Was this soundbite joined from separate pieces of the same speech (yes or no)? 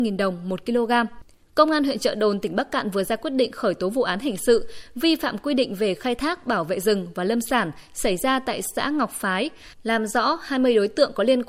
yes